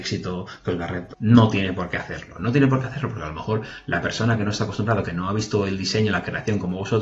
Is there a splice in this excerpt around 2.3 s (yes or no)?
no